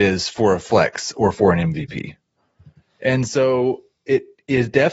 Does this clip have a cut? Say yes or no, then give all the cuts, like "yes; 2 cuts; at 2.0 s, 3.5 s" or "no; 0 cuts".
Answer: no; 0 cuts